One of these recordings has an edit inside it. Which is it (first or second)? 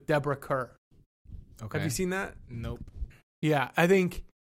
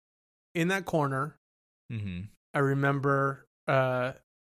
first